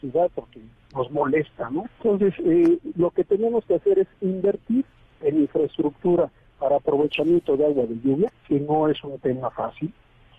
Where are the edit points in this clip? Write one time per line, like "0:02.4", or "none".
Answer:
0:01.8